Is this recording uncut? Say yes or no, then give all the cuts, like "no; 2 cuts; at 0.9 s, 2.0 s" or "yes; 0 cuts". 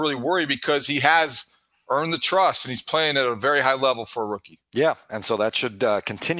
no; 1 cut; at 4.7 s